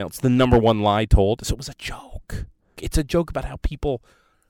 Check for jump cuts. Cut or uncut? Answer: cut